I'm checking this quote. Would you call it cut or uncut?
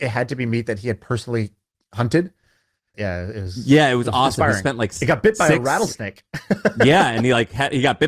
cut